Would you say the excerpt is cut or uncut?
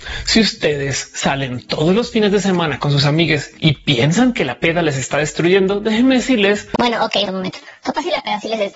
cut